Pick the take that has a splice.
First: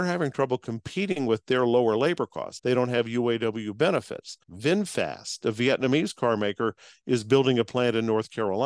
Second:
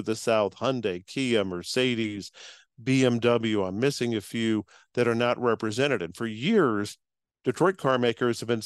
first; 2 cuts; at 2.6 s, 4.4 s

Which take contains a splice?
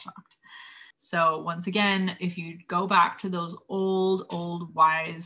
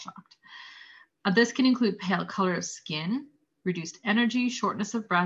first; 1 cut; at 0.9 s

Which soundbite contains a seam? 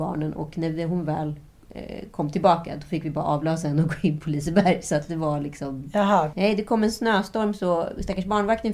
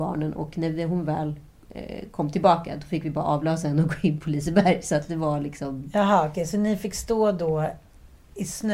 first; 1 cut; at 6.3 s

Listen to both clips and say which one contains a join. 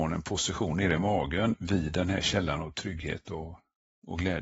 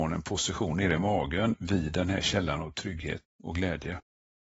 second; 1 cut; at 3.2 s

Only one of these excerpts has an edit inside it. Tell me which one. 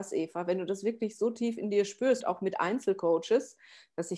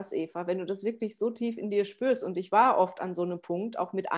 first; 1 cut; at 2.2 s

